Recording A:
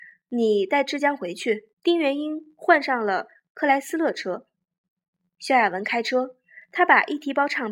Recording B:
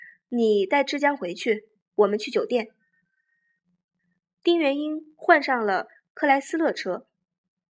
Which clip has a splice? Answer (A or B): A